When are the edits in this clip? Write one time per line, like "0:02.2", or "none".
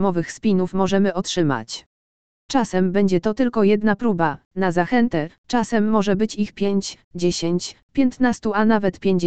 0:02.4